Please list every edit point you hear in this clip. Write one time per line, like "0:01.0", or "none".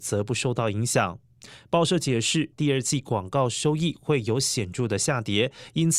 0:02.5

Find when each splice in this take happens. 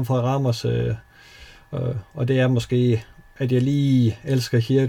none

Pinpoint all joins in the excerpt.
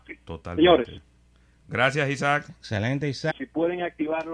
0:03.3

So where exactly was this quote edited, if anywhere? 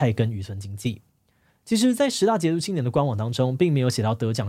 0:01.5

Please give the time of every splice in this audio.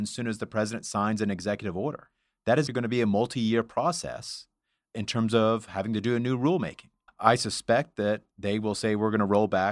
0:02.7
0:07.1

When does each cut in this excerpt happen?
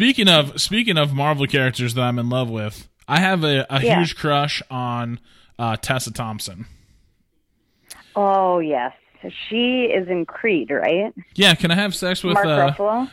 0:11.3

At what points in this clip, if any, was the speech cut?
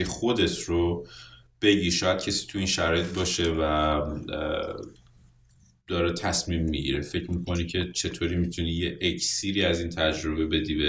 none

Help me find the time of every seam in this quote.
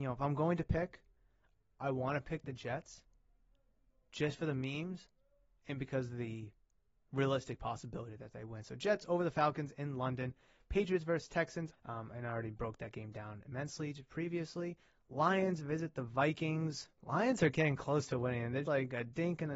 0:11.7
0:17.0
0:18.6

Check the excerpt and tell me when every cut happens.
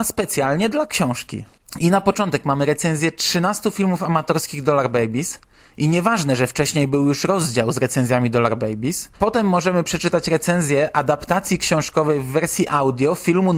0:09.2

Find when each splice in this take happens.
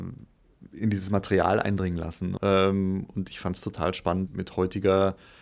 0:02.4
0:04.3

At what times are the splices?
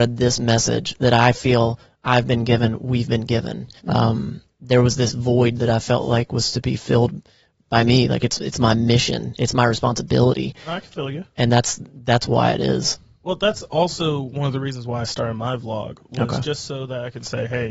0:03.8

